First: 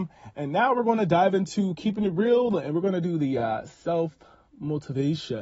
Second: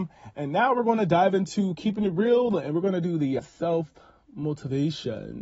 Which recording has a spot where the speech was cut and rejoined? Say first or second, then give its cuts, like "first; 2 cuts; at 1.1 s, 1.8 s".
second; 1 cut; at 3.4 s